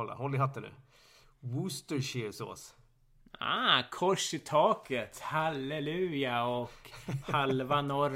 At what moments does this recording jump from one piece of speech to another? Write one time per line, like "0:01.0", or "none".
none